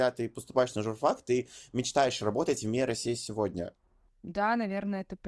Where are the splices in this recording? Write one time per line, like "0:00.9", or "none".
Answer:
none